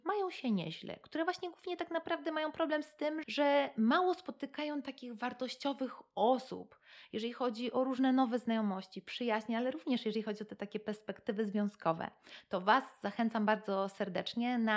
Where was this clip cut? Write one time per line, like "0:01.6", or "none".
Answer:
0:03.2